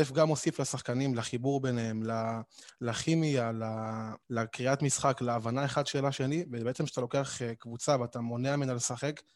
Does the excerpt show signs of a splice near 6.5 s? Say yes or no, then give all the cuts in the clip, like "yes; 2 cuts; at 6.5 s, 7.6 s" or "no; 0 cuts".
no; 1 cut; at 4.2 s